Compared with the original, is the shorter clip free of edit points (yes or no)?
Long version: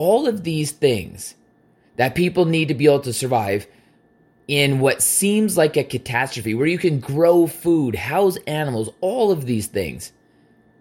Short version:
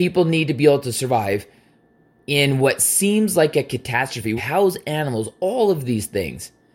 no